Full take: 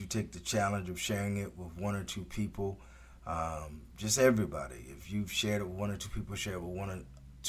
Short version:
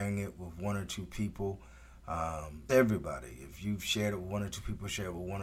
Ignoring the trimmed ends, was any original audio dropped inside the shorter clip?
yes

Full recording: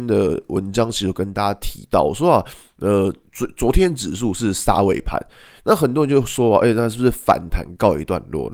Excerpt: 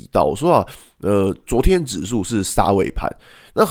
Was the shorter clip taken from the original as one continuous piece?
no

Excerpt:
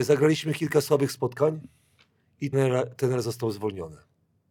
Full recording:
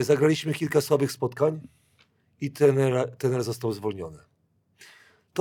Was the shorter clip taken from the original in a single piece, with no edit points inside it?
no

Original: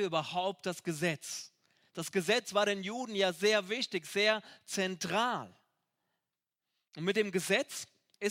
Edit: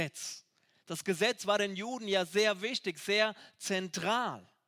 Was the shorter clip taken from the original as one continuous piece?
yes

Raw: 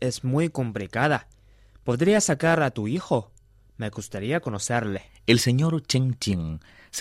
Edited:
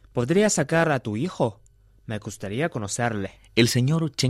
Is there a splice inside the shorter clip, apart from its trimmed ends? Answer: no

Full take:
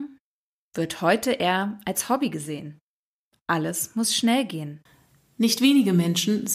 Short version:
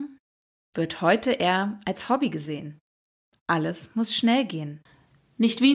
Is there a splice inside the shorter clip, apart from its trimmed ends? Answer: no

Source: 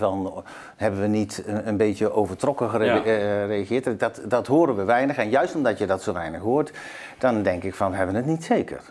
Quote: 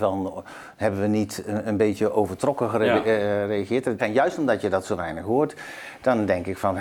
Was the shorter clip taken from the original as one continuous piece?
no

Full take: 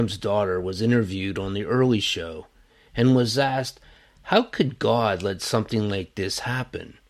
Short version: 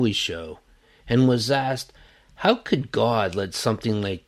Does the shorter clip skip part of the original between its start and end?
no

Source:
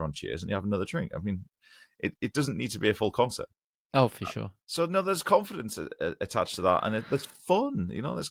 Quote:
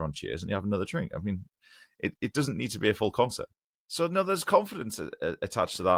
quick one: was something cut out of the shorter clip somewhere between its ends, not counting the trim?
yes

